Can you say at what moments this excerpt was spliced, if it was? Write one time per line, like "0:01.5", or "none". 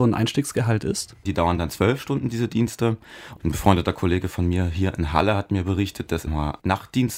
0:01.3
0:03.4
0:06.3